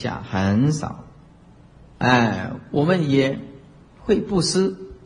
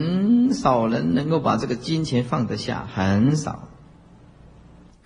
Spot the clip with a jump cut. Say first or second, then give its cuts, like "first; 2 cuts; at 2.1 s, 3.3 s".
first; 1 cut; at 1.9 s